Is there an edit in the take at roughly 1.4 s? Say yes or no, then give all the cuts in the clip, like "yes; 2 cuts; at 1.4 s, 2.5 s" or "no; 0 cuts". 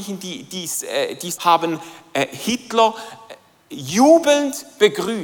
yes; 1 cut; at 1.4 s